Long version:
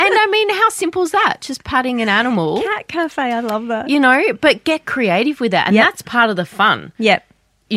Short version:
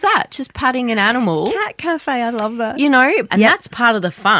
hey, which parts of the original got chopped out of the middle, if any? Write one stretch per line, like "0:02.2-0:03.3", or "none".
0:04.4-0:05.6